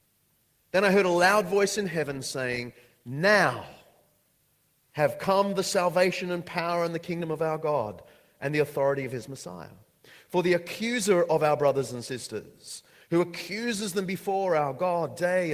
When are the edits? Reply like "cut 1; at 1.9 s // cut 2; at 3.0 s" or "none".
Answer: none